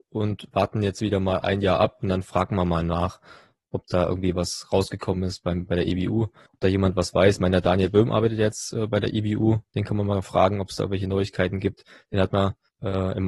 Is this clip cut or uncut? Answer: uncut